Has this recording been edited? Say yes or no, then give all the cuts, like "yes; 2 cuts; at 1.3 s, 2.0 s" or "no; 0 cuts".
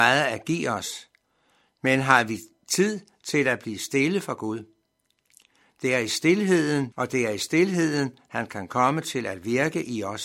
yes; 1 cut; at 6.9 s